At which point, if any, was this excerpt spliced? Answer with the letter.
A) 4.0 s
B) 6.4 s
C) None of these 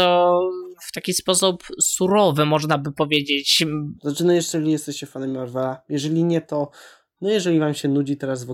A